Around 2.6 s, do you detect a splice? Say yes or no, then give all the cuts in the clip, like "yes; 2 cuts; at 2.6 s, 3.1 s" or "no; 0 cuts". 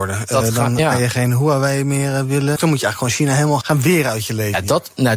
yes; 2 cuts; at 2.6 s, 3.6 s